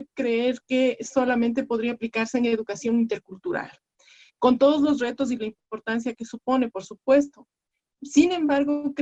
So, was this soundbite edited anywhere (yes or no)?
no